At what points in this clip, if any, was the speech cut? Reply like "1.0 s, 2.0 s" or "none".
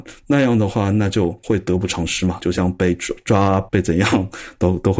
none